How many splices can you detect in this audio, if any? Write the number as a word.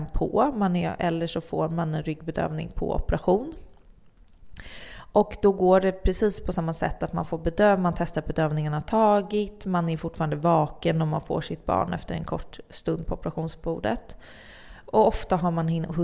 zero